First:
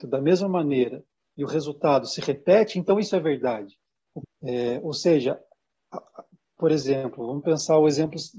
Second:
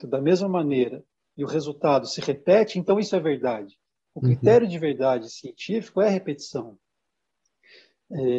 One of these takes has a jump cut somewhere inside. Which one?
first; 1 cut; at 4.2 s

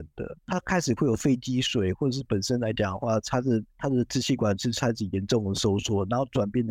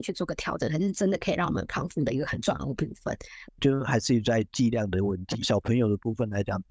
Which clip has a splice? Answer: second; 2 cuts; at 3.5 s, 5.4 s

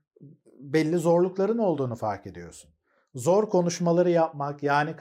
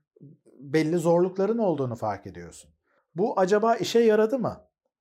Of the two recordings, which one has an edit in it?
second; 1 cut; at 3.0 s

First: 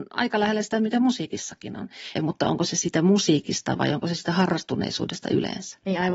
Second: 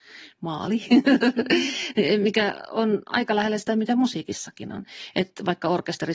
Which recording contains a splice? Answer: first; 1 cut; at 2.2 s

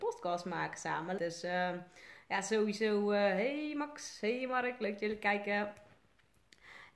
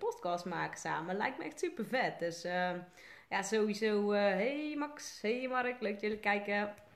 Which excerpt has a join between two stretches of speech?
first; 1 cut; at 1.2 s

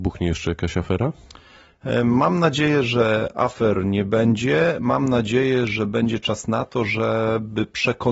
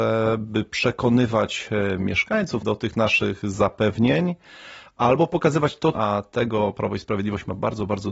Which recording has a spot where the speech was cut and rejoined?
second; 2 cuts; at 2.6 s, 5.9 s

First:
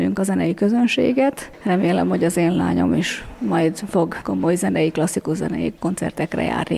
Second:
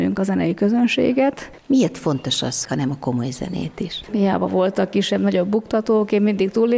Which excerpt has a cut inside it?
second; 3 cuts; at 1.6 s, 2.6 s, 4.1 s

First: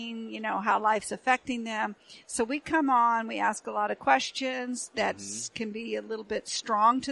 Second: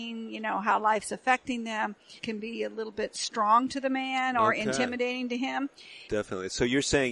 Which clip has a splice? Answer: second; 2 cuts; at 2.2 s, 6.1 s

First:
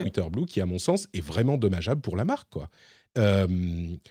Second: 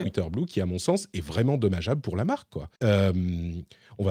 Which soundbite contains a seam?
second; 1 cut; at 2.8 s

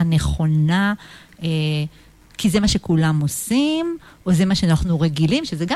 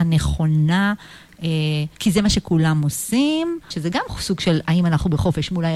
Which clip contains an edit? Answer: second; 2 cuts; at 1.9 s, 3.7 s

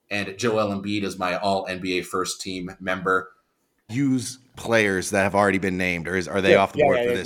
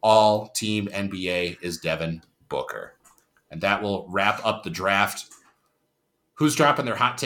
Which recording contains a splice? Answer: first; 1 cut; at 3.9 s

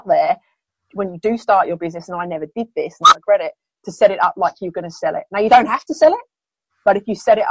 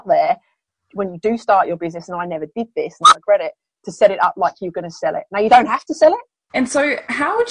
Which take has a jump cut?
second; 1 cut; at 6.5 s

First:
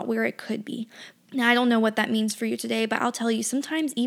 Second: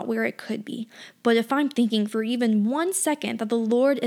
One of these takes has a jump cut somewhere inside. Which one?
first; 1 cut; at 1.2 s

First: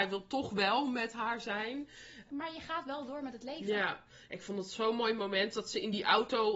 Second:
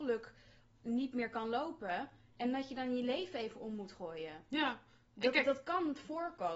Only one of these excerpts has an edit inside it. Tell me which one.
first; 1 cut; at 2.3 s

